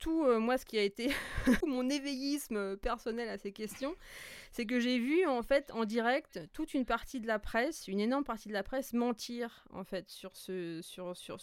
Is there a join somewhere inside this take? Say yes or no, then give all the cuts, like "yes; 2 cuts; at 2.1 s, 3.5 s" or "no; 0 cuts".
yes; 1 cut; at 1.6 s